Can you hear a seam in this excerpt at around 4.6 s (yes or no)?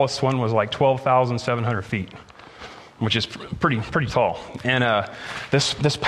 yes